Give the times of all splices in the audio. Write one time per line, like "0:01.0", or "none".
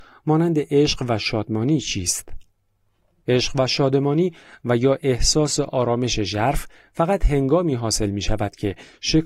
0:03.2

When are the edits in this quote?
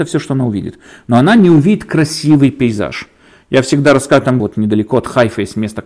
0:04.4

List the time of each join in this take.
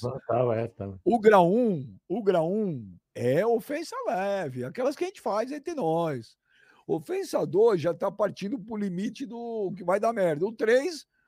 0:03.1

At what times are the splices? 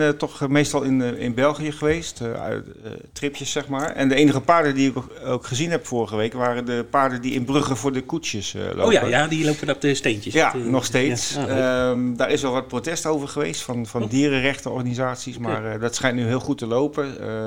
none

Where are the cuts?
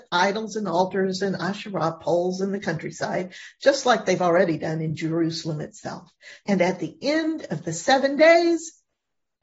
0:06.4

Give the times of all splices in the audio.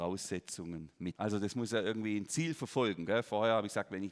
0:01.1

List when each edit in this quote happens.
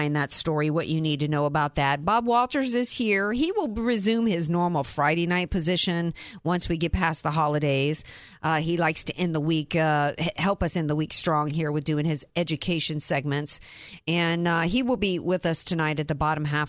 none

